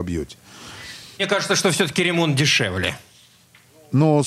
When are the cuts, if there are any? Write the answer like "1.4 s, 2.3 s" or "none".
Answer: 1.2 s